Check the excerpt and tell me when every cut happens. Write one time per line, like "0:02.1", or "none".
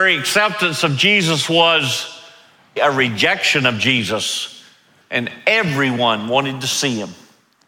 0:02.8
0:05.0